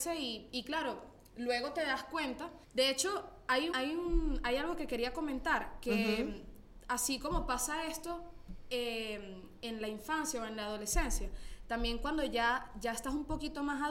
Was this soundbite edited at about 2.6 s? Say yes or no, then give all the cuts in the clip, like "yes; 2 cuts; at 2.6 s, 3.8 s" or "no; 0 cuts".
yes; 2 cuts; at 2.6 s, 3.7 s